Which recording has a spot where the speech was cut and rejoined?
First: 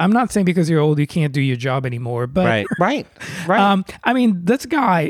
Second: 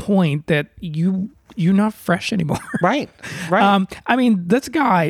first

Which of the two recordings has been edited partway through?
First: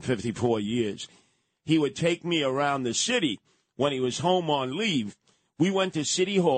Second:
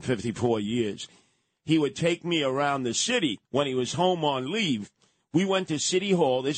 second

